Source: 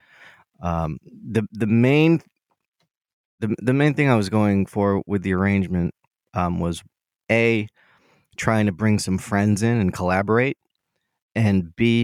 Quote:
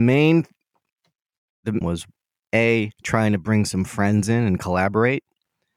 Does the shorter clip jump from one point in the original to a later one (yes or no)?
yes